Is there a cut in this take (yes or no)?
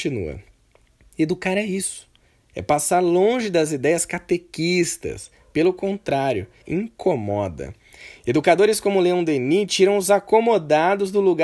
yes